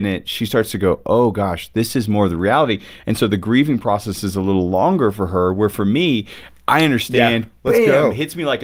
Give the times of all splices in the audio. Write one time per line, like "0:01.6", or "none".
none